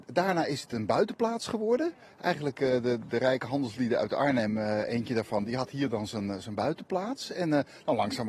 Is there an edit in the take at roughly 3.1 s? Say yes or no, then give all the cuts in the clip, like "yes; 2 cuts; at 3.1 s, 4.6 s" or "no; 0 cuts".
no; 0 cuts